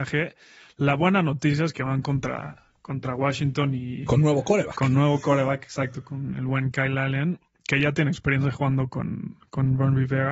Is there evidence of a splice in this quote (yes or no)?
no